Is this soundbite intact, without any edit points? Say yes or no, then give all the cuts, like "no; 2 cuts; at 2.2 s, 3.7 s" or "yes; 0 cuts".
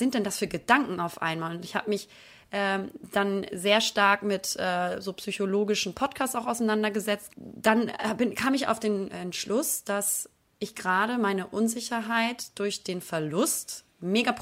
no; 2 cuts; at 7.3 s, 9.1 s